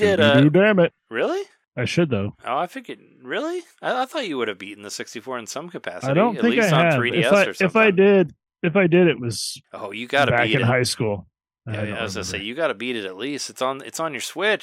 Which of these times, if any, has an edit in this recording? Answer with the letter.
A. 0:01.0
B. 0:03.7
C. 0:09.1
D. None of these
A